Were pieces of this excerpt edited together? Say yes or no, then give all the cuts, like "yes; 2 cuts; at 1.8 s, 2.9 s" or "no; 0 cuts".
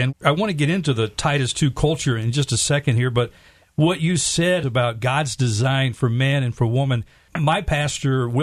no; 0 cuts